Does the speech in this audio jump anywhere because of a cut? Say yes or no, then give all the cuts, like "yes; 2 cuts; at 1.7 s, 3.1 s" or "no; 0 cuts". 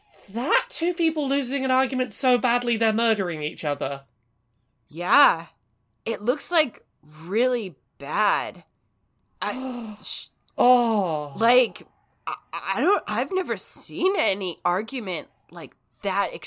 no; 0 cuts